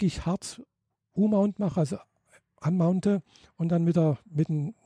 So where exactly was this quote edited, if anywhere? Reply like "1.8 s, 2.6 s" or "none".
none